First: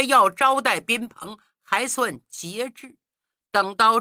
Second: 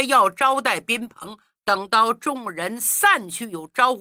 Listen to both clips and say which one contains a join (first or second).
second